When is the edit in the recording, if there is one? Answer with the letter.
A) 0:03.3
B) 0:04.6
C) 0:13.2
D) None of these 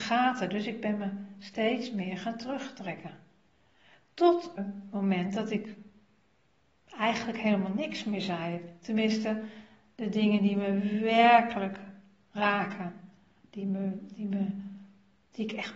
B